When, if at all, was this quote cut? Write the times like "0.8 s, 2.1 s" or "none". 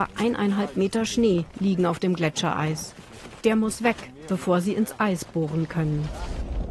none

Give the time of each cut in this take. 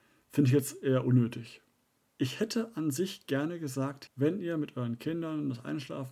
2.0 s, 4.1 s

